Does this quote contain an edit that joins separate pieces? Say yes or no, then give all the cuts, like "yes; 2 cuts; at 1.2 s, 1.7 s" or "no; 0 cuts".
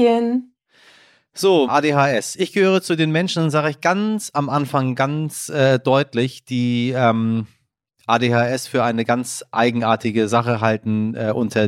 yes; 1 cut; at 1.7 s